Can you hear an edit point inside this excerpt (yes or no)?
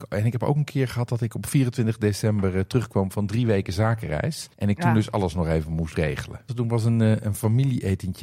yes